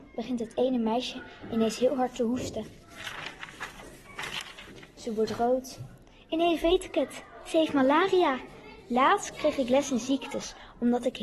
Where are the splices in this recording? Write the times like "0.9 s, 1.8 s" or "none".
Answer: none